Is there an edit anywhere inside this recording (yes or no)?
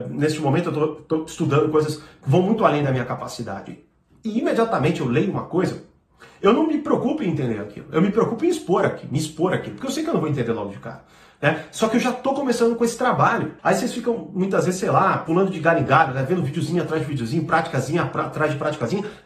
yes